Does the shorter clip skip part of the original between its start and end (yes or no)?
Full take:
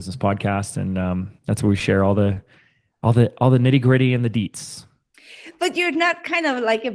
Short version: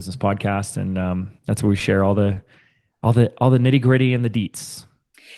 no